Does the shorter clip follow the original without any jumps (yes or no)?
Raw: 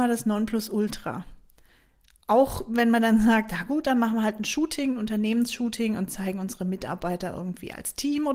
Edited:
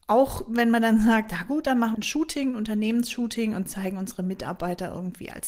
no